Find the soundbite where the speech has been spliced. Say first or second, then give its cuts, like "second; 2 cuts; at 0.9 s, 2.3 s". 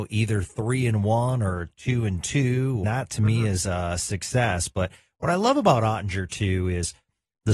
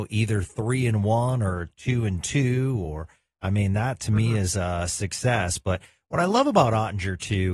first; 1 cut; at 2.8 s